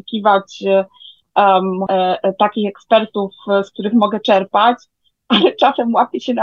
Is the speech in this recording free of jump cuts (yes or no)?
no